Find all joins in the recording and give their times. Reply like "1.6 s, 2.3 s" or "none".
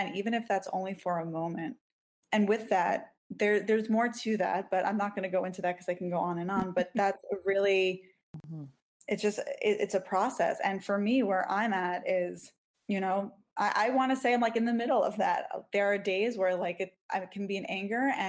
3.1 s